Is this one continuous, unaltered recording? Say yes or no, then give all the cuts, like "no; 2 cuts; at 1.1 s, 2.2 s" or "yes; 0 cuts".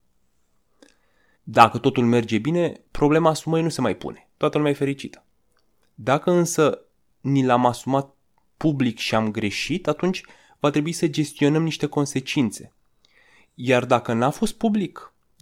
no; 1 cut; at 1.4 s